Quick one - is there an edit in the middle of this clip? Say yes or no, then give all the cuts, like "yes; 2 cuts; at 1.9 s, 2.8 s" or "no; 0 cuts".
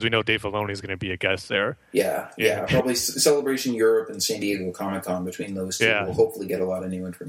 no; 0 cuts